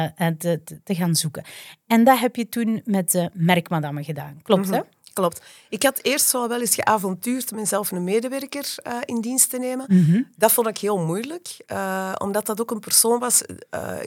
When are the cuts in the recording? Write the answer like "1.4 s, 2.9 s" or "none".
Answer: none